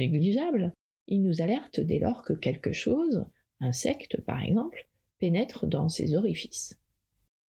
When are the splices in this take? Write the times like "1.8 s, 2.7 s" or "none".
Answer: none